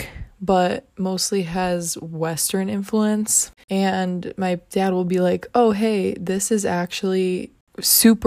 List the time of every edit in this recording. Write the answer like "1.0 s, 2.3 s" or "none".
3.6 s